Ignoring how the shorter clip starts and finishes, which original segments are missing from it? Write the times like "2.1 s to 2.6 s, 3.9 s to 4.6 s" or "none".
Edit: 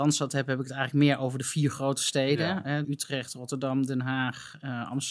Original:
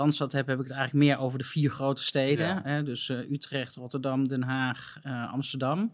2.8 s to 3.3 s